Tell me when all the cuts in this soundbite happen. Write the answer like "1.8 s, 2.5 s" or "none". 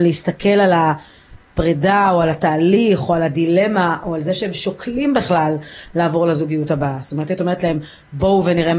none